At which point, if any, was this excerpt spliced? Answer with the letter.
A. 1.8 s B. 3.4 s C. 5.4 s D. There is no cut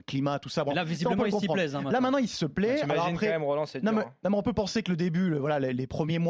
D